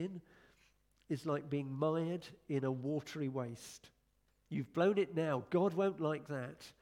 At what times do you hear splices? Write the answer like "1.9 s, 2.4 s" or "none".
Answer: 4.3 s